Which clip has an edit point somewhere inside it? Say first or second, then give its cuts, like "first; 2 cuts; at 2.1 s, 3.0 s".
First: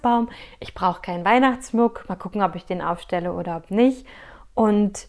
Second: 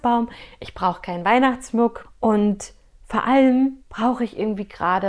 second; 2 cuts; at 2.0 s, 3.8 s